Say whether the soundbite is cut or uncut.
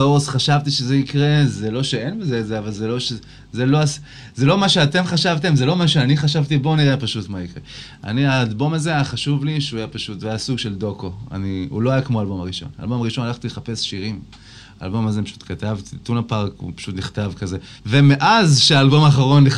cut